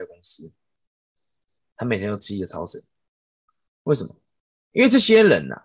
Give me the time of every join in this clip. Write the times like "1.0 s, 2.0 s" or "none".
none